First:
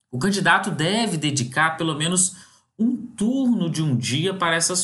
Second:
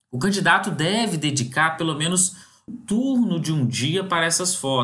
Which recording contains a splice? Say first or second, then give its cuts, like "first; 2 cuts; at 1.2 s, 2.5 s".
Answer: second; 1 cut; at 2.7 s